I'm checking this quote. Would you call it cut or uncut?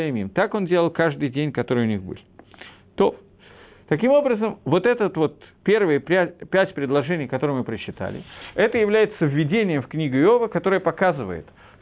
uncut